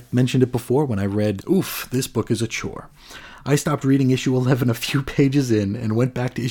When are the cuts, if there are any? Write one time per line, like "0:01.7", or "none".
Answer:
0:01.4